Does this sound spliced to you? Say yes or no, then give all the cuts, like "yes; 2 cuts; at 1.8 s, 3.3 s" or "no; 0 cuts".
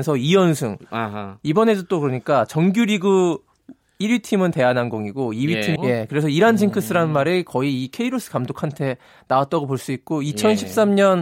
yes; 1 cut; at 5.8 s